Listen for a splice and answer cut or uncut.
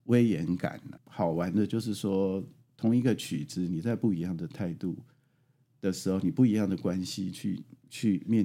cut